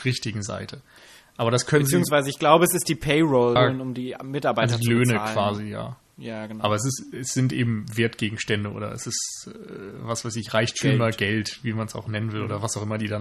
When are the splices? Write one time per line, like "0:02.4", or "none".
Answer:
0:03.6